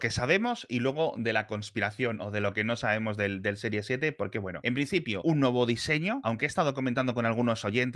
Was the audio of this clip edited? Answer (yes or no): no